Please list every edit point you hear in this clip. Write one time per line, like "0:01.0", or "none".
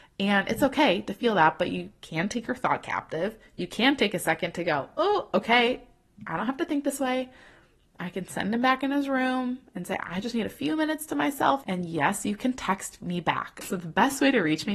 0:11.6
0:13.6